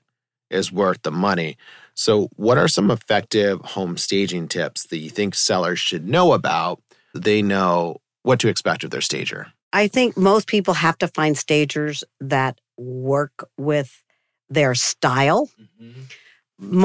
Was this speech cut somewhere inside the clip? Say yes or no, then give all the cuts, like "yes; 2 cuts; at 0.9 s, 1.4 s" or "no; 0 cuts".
yes; 1 cut; at 7.1 s